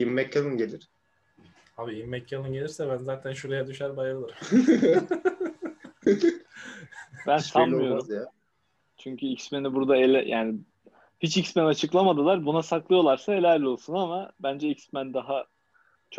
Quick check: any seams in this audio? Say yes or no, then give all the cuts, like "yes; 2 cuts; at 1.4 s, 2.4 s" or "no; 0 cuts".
no; 0 cuts